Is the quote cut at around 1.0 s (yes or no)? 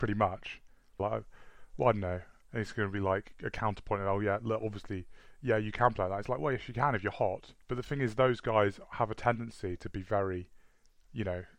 yes